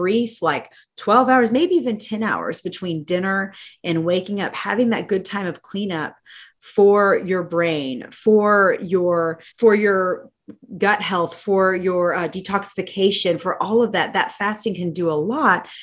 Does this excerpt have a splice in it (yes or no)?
yes